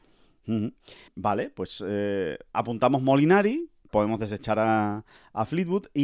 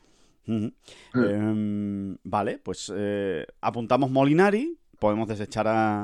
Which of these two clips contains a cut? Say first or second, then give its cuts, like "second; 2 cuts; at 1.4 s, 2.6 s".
first; 1 cut; at 1.1 s